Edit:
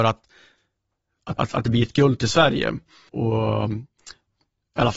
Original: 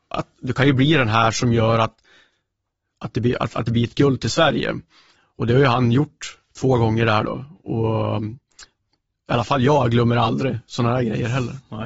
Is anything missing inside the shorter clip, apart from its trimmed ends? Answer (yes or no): yes